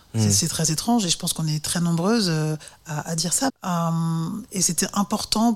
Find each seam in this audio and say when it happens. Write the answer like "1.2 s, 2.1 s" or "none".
3.5 s